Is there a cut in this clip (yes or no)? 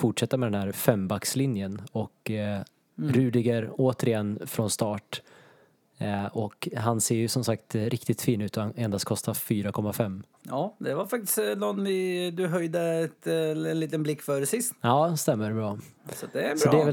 no